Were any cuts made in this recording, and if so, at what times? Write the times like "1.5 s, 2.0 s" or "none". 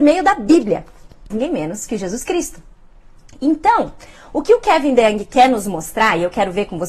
1.3 s

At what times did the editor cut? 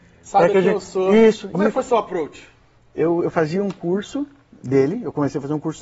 1.5 s

